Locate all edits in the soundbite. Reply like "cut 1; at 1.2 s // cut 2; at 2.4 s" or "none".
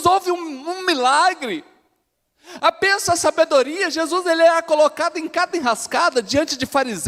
none